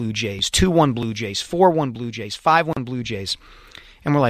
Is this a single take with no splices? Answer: yes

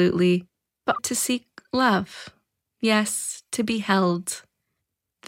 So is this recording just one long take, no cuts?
no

